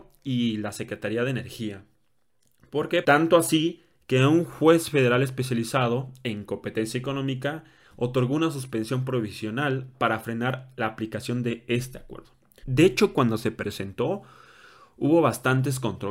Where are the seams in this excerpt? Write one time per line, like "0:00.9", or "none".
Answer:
0:03.0
0:12.6